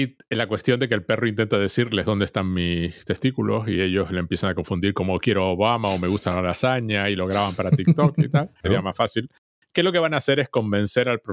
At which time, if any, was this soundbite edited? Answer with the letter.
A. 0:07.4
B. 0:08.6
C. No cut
B